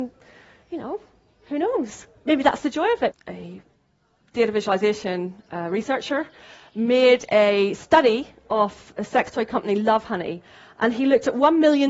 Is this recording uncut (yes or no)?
no